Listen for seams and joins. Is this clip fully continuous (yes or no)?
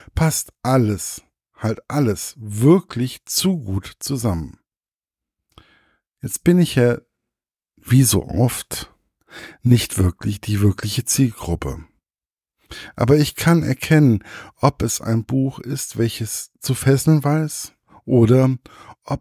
yes